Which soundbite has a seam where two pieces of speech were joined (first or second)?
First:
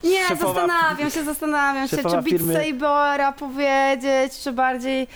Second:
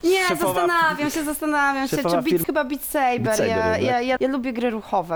second